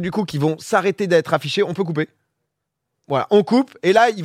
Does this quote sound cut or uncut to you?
cut